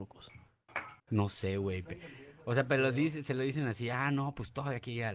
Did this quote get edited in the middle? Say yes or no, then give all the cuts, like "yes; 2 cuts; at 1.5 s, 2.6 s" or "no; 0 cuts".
yes; 1 cut; at 1.0 s